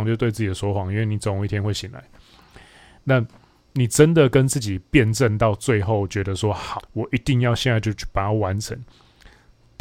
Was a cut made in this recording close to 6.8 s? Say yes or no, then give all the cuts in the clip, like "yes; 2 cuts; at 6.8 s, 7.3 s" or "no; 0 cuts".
yes; 1 cut; at 6.8 s